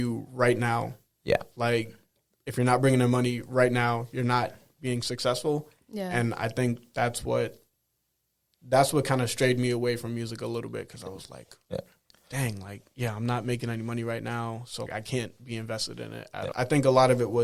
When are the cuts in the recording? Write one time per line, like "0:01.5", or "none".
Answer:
0:14.9
0:16.5